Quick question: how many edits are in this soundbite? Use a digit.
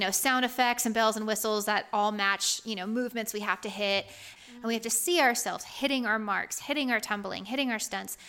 2